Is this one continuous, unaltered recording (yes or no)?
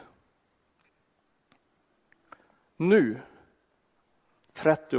no